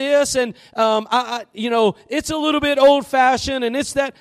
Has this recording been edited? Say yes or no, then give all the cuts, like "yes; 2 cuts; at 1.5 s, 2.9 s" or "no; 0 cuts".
no; 0 cuts